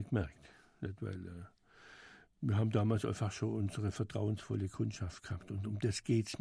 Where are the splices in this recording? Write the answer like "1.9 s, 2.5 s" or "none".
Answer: none